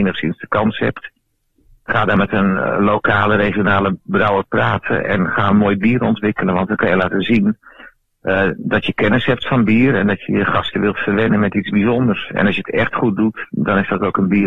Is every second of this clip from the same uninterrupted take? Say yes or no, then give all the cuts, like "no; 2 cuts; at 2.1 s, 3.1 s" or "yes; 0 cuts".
yes; 0 cuts